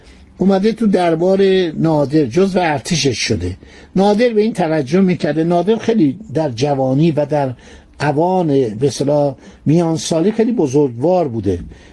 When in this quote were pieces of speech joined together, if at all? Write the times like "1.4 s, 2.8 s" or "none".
none

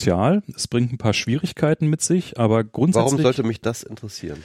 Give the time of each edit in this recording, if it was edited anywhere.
none

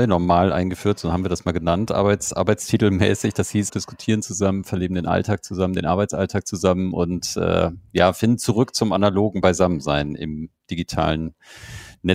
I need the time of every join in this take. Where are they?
3.7 s

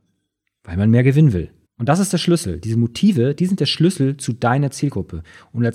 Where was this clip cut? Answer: 1.7 s

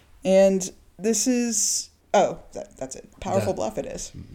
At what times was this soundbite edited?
2.0 s, 3.1 s

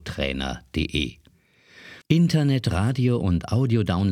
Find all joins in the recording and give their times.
2.0 s

